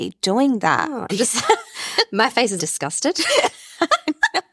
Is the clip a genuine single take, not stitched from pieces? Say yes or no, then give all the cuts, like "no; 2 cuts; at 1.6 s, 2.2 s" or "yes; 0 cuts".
no; 2 cuts; at 1.1 s, 2.6 s